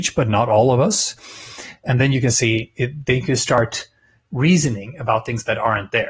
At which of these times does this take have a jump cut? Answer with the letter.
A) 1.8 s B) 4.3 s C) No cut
A